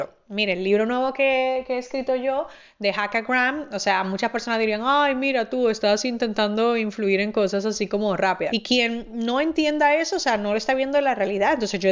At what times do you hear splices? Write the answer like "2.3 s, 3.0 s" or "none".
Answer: 8.5 s